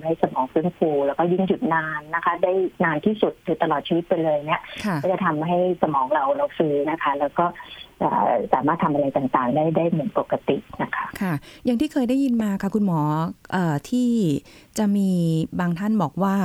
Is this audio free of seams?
no; 1 cut; at 6.8 s

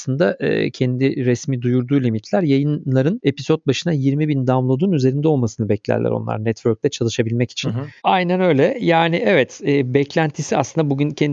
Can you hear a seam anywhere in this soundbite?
yes; 1 cut; at 8.0 s

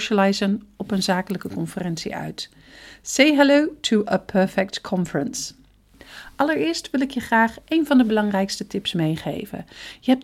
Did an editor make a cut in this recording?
no; 0 cuts

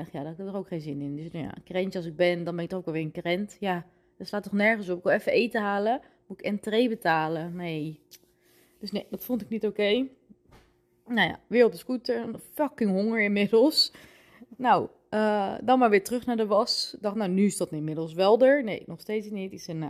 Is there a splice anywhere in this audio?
no; 0 cuts

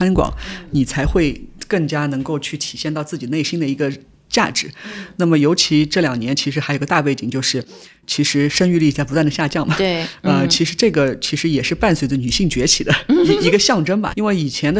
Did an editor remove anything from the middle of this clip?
no; 0 cuts

